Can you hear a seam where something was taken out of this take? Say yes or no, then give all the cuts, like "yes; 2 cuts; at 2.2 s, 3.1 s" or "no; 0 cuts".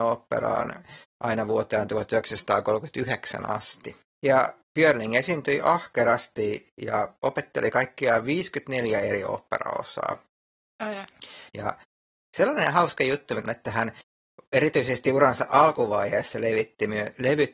yes; 2 cuts; at 11.5 s, 13.4 s